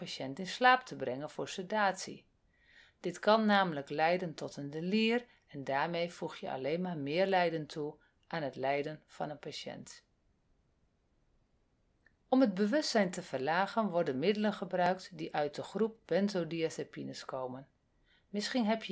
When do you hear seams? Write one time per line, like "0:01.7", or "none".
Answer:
none